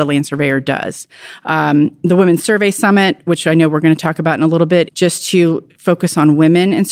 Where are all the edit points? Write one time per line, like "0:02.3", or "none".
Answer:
0:04.9